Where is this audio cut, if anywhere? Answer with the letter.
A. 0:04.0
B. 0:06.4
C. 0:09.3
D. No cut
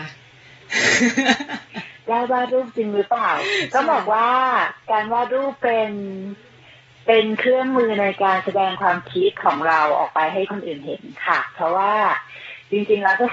C